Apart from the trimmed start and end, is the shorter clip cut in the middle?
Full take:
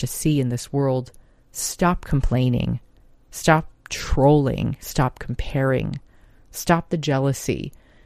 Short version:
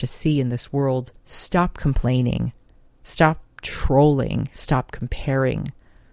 yes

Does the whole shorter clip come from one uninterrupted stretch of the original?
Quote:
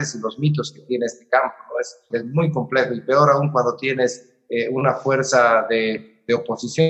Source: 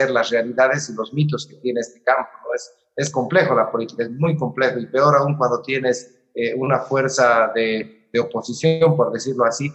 no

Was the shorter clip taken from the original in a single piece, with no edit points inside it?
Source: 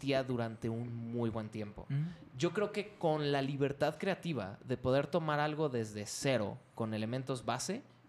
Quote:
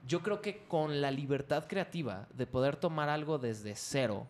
yes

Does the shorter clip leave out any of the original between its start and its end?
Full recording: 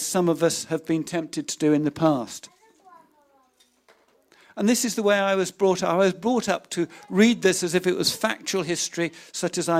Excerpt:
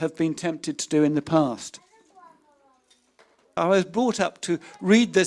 yes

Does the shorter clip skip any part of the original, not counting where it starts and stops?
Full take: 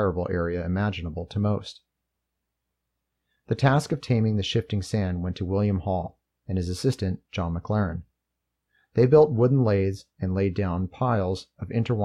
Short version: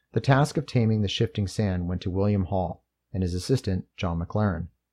no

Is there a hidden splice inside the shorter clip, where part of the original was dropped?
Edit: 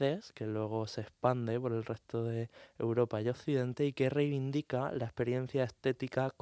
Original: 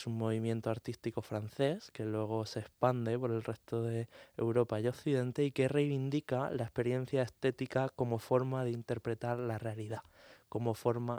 no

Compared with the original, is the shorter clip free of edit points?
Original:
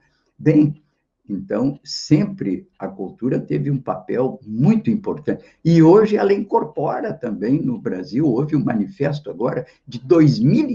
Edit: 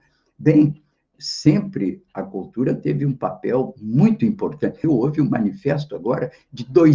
no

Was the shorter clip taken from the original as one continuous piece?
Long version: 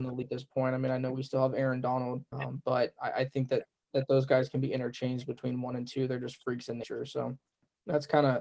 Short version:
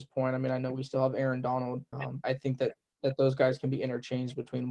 no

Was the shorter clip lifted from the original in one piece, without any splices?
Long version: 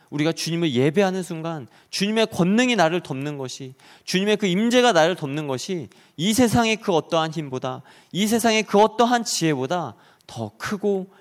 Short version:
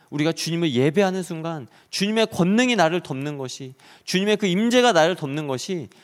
yes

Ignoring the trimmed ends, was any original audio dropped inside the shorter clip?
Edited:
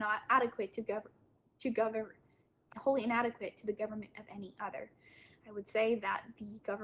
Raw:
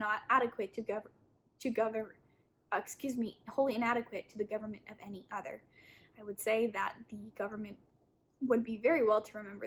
yes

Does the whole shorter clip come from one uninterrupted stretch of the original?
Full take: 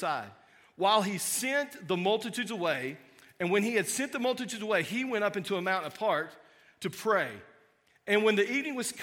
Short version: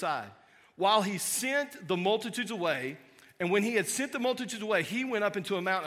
yes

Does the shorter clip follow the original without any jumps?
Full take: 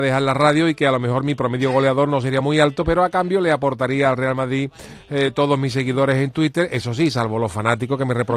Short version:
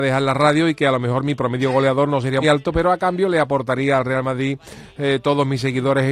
no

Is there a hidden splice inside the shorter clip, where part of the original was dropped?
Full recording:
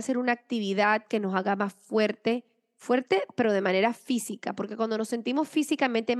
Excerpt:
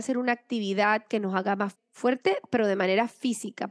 yes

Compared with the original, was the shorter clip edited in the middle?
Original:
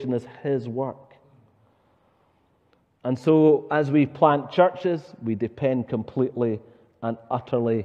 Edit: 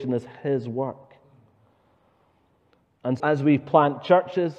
yes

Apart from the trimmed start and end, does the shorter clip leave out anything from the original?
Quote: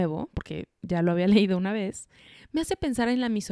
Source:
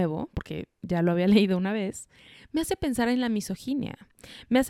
no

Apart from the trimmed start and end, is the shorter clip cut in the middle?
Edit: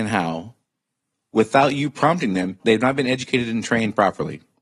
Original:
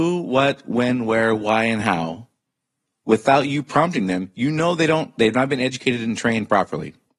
yes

